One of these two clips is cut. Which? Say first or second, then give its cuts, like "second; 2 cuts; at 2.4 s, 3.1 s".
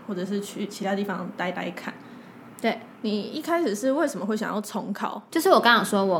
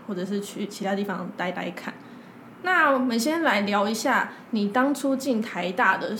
first; 1 cut; at 2.6 s